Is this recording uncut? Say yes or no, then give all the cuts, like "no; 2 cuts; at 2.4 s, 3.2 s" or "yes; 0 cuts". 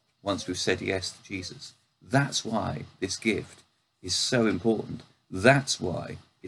yes; 0 cuts